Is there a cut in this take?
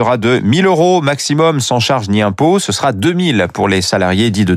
no; 0 cuts

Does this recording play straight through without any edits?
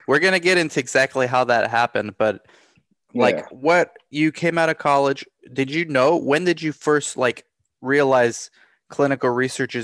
yes; 0 cuts

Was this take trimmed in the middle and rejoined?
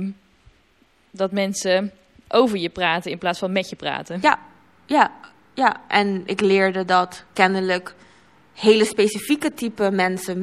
no; 0 cuts

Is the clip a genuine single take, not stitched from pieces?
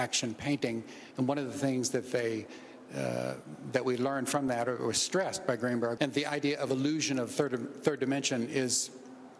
no; 1 cut; at 6.0 s

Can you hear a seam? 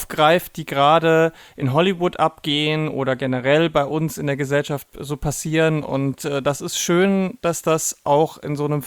no; 0 cuts

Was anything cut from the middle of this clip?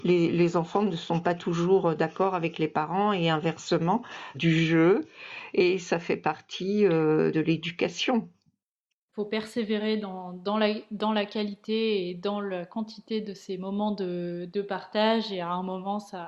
yes; 2 cuts; at 4.3 s, 7.3 s

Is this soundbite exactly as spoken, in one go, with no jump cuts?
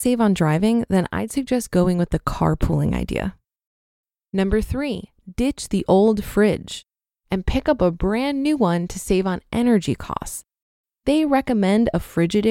yes; 0 cuts

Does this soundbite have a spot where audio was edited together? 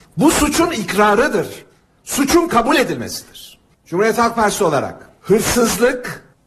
no; 0 cuts

